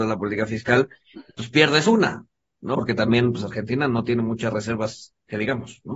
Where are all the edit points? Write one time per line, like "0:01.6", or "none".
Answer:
0:02.8